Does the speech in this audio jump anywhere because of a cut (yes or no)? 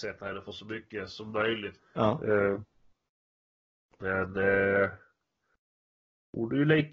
yes